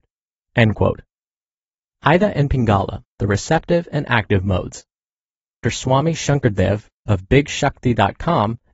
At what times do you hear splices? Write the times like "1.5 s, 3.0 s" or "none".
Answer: 5.6 s